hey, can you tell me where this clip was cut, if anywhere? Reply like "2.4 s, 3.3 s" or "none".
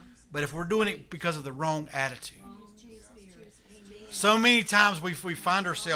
none